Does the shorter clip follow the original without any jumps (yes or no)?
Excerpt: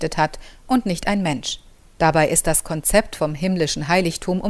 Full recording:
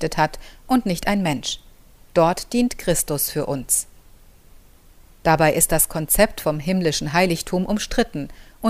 no